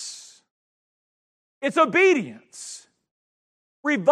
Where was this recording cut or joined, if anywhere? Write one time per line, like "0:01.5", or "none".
0:01.5